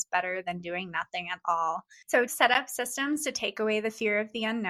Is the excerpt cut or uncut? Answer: cut